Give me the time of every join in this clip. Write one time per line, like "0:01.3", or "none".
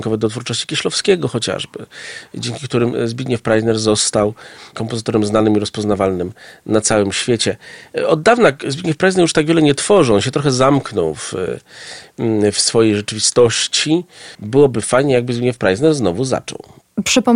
0:14.3